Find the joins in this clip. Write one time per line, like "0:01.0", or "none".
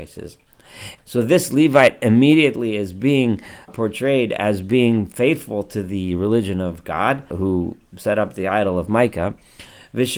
0:01.0
0:03.7
0:07.3